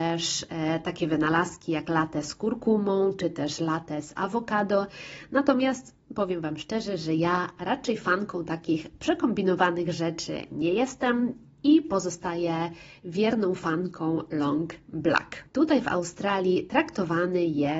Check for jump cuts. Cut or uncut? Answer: cut